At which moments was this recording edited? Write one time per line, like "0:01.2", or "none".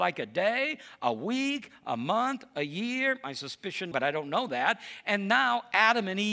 0:03.9